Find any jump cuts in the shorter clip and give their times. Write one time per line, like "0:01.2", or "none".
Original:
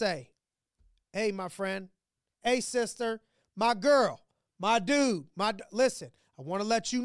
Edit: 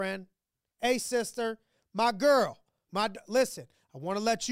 0:02.9